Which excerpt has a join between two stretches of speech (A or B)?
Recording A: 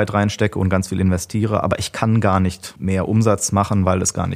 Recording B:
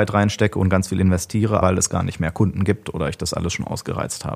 B